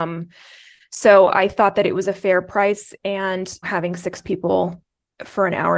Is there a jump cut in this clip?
yes; 1 cut; at 3.6 s

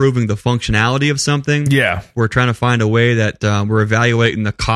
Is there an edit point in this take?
no; 0 cuts

